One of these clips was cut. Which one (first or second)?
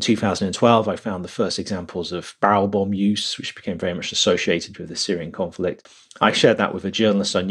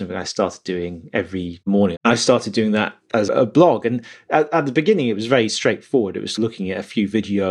second